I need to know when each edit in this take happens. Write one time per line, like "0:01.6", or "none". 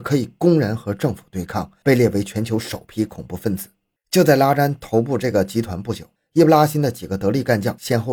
0:04.0
0:06.2